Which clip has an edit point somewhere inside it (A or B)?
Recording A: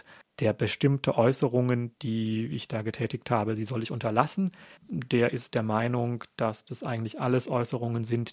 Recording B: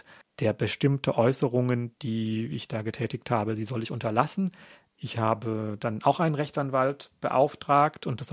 A